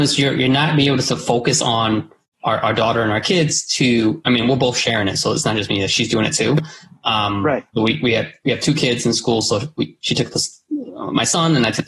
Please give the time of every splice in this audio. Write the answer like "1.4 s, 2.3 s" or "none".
none